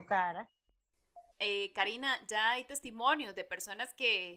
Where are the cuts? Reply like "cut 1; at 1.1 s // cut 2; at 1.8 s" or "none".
cut 1; at 1.3 s